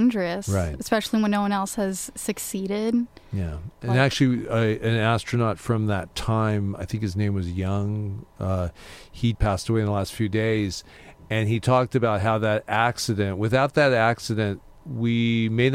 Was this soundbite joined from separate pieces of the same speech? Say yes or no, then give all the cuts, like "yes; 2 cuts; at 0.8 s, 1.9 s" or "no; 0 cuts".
yes; 1 cut; at 9.3 s